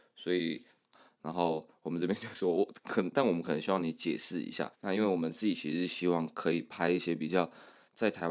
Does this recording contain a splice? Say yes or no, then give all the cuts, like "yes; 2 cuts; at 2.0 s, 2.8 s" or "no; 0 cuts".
yes; 2 cuts; at 0.9 s, 4.7 s